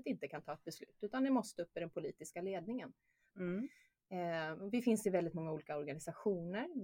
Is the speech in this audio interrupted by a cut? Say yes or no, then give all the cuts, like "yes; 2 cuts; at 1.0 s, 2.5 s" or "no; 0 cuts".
yes; 1 cut; at 3.3 s